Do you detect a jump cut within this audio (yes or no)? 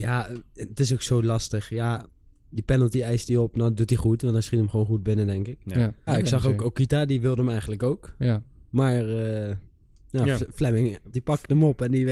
yes